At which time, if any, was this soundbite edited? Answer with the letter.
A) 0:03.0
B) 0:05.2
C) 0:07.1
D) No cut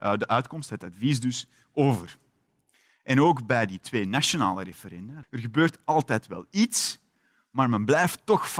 B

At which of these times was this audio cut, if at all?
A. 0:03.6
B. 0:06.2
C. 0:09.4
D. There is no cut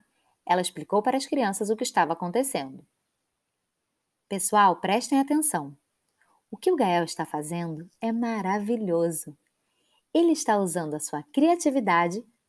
D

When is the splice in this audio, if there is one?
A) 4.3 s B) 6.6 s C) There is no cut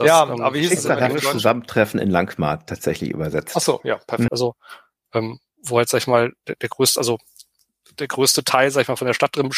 A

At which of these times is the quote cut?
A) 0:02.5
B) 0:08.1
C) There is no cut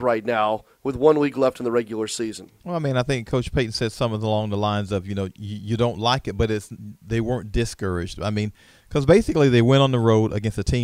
C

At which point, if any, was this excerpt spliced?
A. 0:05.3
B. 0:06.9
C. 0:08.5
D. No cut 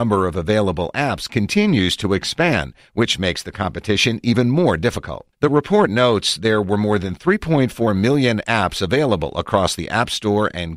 A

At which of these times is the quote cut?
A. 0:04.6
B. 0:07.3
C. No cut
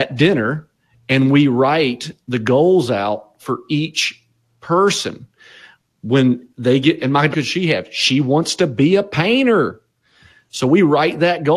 B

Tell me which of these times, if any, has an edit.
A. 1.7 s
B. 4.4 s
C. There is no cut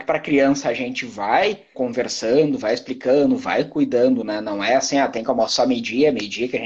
A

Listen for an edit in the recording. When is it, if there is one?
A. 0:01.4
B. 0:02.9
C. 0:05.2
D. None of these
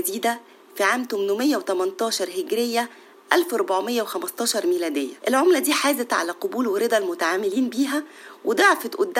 C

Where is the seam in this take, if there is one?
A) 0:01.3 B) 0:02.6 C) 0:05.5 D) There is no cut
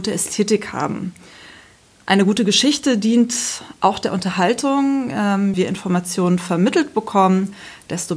C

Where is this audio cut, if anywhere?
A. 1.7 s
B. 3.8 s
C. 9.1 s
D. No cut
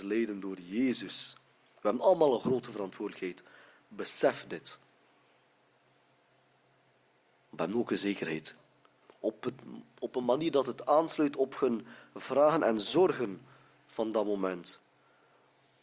C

